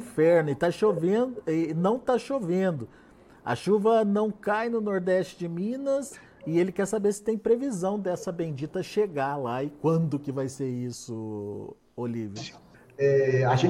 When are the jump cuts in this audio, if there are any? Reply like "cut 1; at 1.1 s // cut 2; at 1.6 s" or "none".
cut 1; at 12.7 s